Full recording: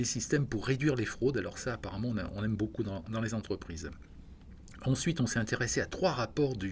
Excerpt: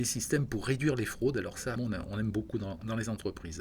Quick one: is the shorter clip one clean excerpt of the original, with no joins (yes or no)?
no